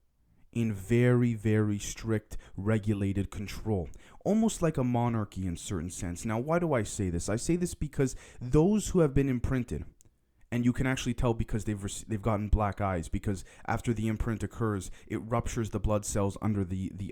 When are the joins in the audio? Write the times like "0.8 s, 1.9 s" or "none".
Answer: none